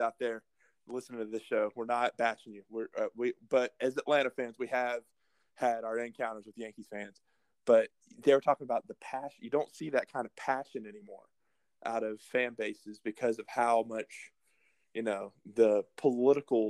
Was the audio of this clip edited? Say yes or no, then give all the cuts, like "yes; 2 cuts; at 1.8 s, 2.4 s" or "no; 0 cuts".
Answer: no; 0 cuts